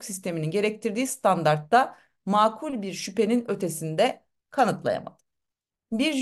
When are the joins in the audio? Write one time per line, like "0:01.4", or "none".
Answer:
none